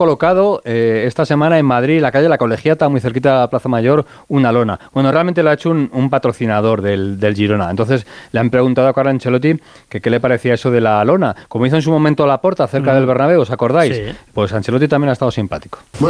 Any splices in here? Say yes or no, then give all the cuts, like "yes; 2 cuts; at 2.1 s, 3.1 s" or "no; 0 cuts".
no; 0 cuts